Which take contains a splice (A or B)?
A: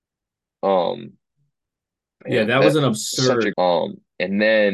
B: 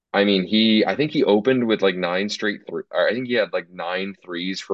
A